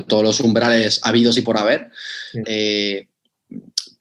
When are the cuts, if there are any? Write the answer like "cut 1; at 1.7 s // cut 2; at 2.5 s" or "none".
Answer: cut 1; at 2.4 s